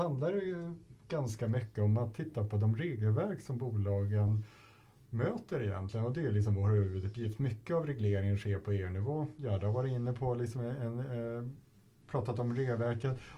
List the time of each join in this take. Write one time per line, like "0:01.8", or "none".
none